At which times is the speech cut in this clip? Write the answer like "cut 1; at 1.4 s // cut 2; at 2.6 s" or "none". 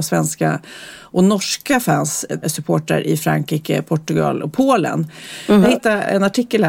cut 1; at 2.4 s // cut 2; at 5.6 s